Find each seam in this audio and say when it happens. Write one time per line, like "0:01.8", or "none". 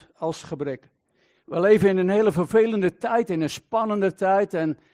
0:01.4